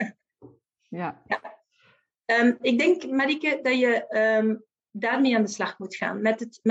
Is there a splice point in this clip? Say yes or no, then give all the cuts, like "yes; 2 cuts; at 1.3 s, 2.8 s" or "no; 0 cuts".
no; 0 cuts